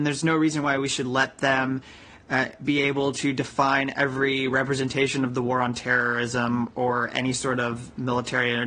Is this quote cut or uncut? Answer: uncut